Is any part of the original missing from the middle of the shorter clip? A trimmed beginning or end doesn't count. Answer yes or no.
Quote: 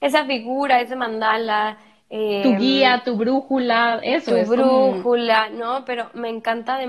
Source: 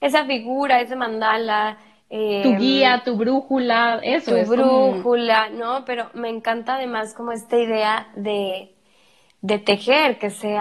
no